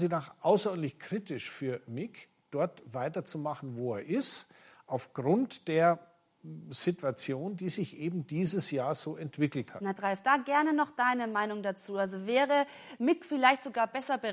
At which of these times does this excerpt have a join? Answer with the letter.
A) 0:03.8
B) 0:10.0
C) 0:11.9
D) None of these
B